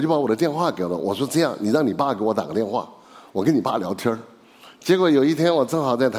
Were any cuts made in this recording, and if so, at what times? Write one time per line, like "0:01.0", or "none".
none